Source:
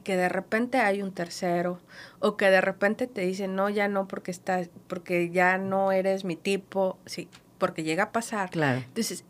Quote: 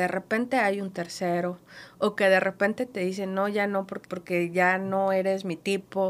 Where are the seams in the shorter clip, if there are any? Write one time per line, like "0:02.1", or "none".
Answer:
0:04.0